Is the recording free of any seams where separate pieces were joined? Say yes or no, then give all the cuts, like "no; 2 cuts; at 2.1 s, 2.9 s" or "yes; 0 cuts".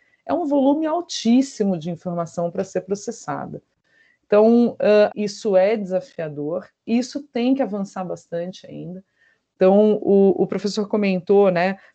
no; 1 cut; at 5.1 s